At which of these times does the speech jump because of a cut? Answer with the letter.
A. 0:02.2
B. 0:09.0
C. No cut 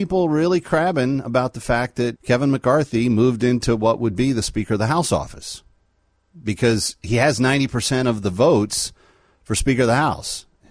A